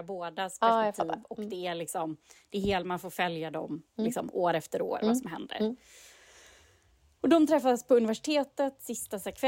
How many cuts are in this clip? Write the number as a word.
zero